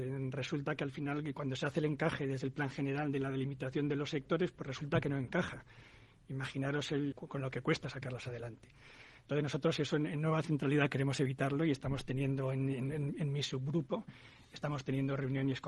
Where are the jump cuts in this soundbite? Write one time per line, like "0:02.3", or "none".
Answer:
0:07.1